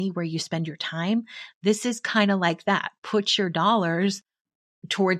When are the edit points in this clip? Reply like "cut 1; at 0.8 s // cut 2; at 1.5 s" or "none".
none